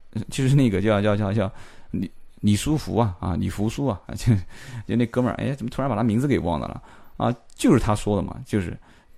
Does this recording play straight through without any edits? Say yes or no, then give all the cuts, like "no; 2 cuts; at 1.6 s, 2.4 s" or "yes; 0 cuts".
yes; 0 cuts